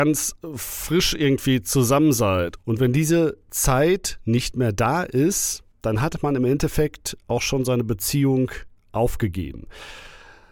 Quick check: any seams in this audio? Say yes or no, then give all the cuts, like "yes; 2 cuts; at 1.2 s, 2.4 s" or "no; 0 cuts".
yes; 2 cuts; at 2.6 s, 5.7 s